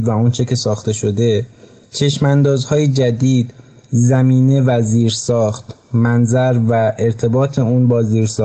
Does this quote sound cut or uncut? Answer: uncut